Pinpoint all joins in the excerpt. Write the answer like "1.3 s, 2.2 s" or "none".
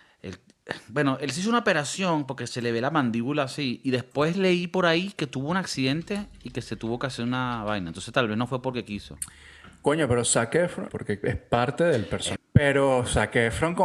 10.9 s, 12.4 s